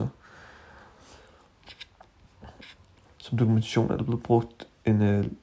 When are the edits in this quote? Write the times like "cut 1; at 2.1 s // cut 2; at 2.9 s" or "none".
cut 1; at 3.0 s